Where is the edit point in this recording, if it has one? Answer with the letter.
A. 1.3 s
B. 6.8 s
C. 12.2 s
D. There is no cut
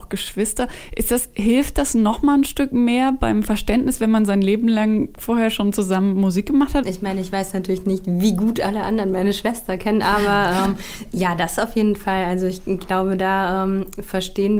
B